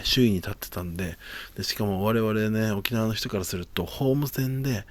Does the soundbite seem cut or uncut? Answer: uncut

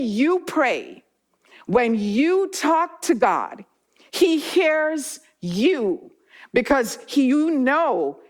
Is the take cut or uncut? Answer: uncut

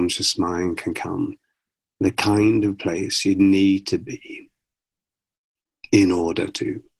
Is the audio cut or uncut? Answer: uncut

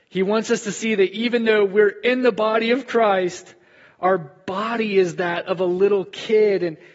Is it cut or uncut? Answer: uncut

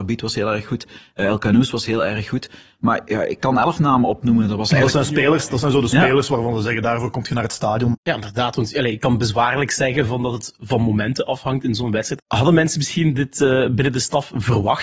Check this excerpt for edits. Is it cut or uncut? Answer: cut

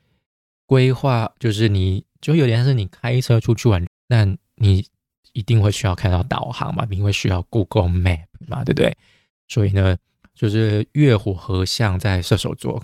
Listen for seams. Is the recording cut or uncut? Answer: cut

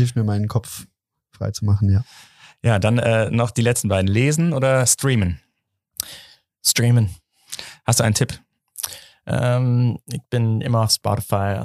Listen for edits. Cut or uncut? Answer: uncut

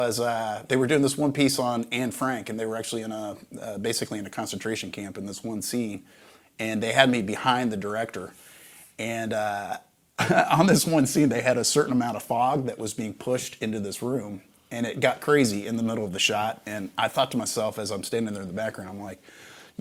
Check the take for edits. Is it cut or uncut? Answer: uncut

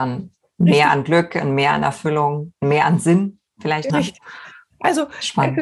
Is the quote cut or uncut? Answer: cut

